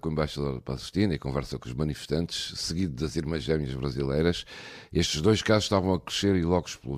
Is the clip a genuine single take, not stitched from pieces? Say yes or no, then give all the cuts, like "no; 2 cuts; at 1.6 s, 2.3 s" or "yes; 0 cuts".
yes; 0 cuts